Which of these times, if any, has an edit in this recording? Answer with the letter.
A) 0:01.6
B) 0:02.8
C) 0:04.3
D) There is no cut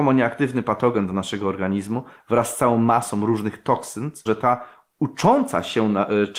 C